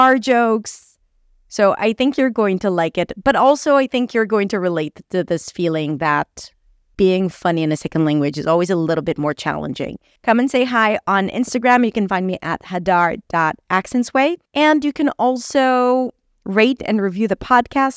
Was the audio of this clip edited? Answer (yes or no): yes